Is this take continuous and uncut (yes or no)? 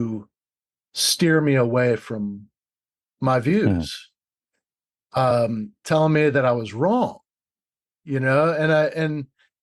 yes